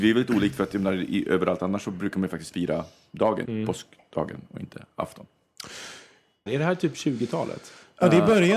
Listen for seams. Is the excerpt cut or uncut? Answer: cut